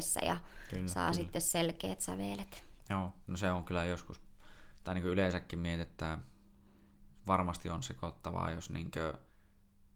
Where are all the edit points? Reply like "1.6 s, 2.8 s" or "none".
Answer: none